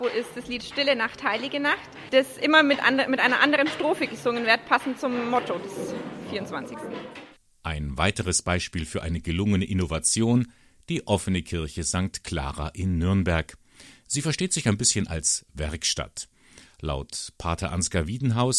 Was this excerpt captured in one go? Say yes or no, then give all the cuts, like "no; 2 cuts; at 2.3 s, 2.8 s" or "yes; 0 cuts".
yes; 0 cuts